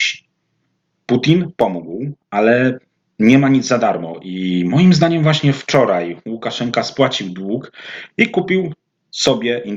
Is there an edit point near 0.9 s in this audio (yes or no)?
yes